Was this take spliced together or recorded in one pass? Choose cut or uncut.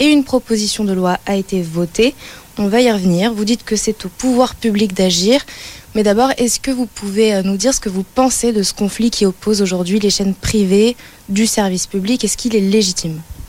uncut